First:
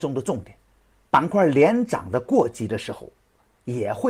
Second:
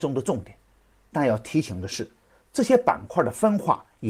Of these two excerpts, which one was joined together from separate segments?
first; 1 cut; at 1.1 s

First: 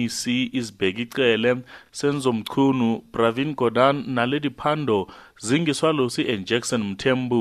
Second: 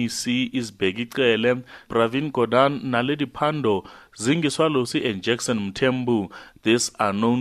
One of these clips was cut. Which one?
second; 1 cut; at 1.9 s

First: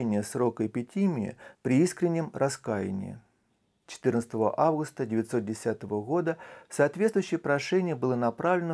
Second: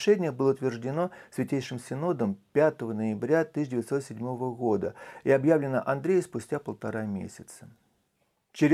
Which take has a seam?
first; 1 cut; at 1.5 s

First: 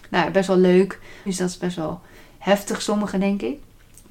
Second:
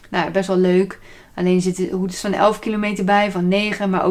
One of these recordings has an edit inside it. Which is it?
first; 1 cut; at 1.3 s

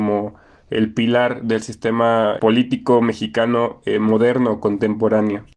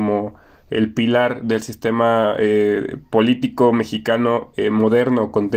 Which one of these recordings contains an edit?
first; 1 cut; at 2.4 s

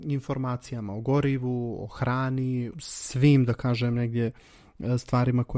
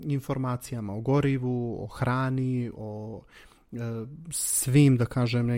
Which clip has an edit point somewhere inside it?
first; 1 cut; at 2.7 s

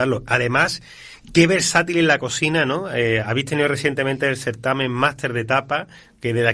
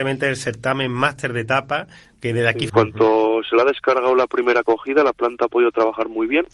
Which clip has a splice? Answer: second; 1 cut; at 2.7 s

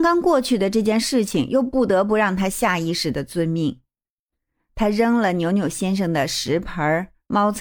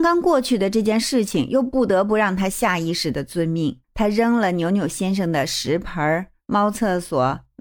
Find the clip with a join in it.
second; 1 cut; at 3.8 s

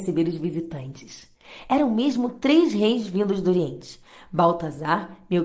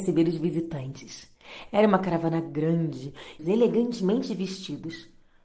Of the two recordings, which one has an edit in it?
second; 2 cuts; at 1.7 s, 3.4 s

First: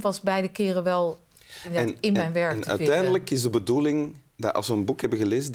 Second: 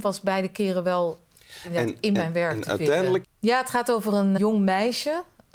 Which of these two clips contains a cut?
second; 2 cuts; at 3.2 s, 4.4 s

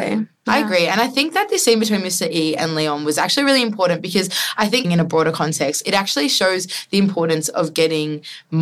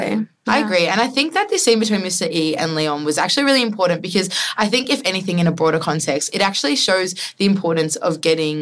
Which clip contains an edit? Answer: first; 1 cut; at 4.8 s

